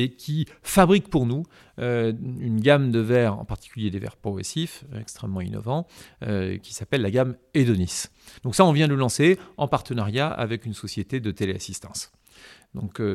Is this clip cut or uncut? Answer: cut